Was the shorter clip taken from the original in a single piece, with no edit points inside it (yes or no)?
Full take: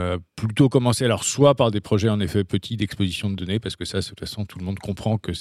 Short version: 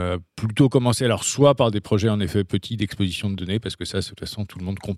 yes